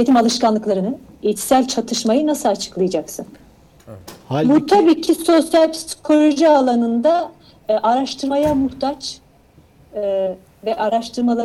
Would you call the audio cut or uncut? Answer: cut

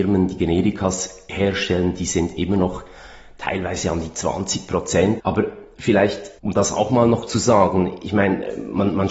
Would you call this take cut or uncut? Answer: cut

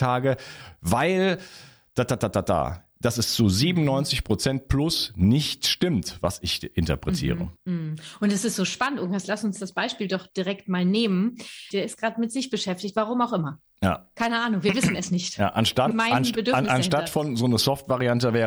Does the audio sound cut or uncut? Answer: cut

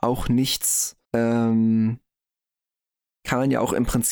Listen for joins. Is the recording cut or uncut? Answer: cut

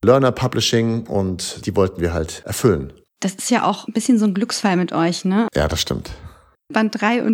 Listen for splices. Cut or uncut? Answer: cut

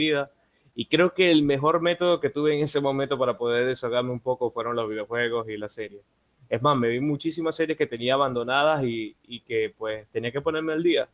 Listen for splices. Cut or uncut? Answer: uncut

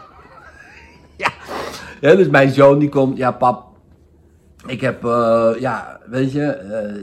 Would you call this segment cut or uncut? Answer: uncut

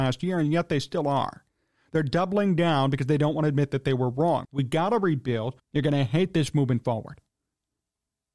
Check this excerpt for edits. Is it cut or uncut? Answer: cut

